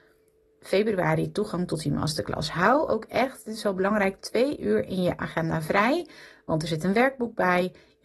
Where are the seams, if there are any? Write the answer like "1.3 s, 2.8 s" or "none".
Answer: none